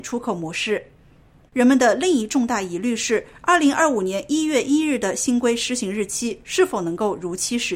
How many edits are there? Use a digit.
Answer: 1